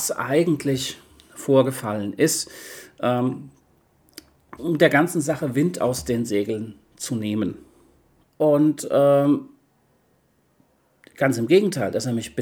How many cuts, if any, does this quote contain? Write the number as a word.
two